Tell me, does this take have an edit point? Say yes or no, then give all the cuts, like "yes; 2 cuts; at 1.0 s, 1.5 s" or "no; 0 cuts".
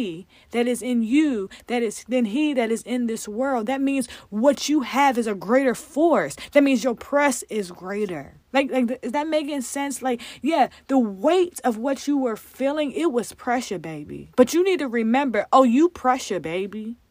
yes; 2 cuts; at 8.4 s, 14.3 s